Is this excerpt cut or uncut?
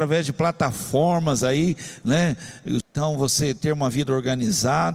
cut